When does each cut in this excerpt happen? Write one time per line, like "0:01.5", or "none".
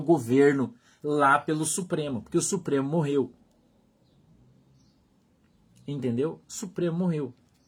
0:06.4